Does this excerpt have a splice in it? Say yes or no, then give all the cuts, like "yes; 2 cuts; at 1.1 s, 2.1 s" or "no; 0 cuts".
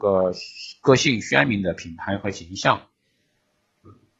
no; 0 cuts